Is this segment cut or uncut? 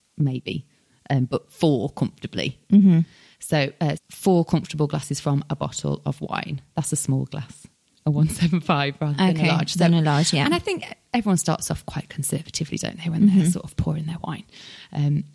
cut